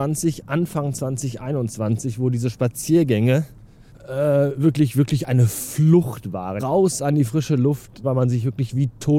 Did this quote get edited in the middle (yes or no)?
yes